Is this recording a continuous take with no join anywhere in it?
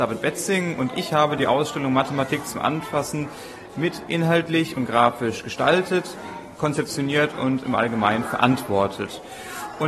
yes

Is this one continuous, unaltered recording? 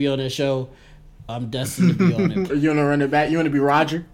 no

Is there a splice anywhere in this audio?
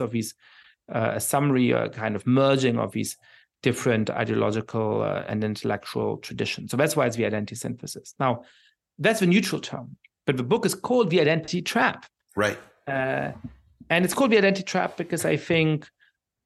no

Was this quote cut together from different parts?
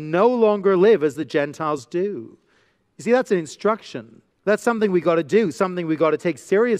yes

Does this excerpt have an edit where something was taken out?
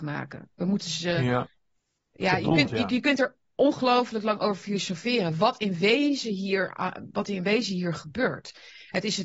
no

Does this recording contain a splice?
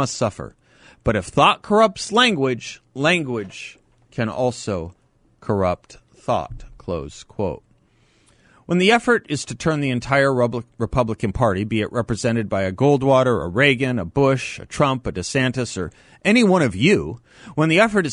no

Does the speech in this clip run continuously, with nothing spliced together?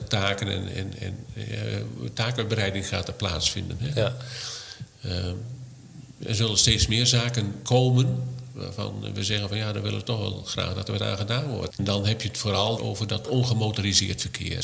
no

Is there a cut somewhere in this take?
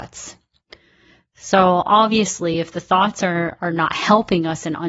no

